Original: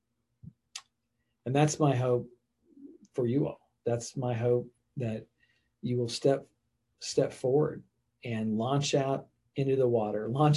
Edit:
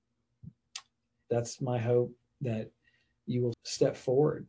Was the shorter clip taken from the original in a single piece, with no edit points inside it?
no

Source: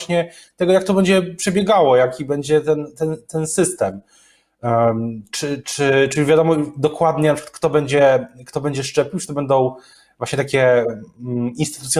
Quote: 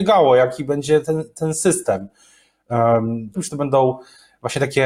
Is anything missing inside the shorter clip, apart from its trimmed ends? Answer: yes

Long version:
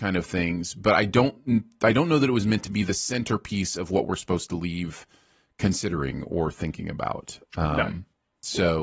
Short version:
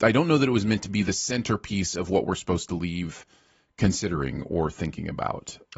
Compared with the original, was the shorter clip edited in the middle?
no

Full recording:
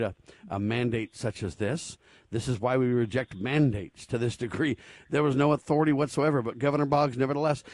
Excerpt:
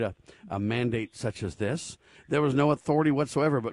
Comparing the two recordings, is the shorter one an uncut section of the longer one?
no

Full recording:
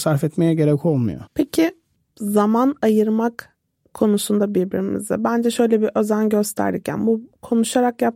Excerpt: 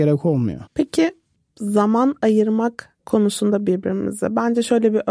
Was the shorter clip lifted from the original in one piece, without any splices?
no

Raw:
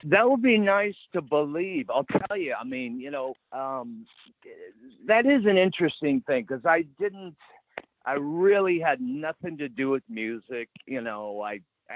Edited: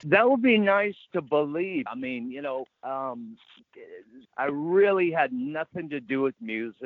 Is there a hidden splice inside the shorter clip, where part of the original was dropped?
yes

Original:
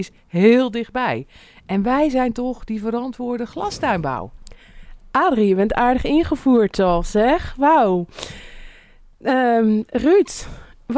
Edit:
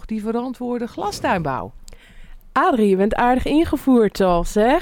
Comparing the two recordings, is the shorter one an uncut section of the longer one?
yes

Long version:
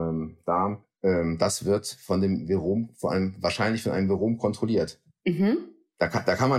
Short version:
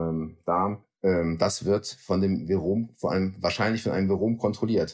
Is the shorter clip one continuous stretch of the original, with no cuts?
yes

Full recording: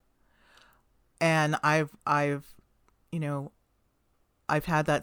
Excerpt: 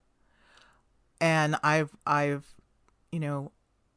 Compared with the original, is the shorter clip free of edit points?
yes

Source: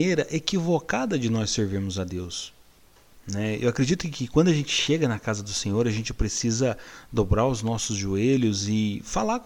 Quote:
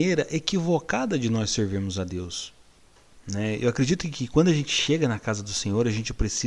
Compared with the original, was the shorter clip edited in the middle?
no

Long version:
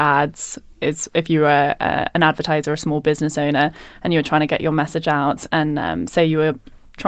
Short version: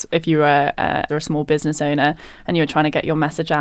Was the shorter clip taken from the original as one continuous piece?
no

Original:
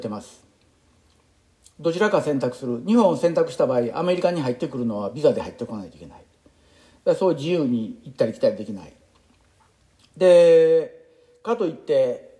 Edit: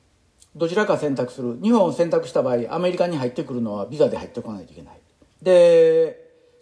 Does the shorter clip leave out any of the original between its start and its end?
yes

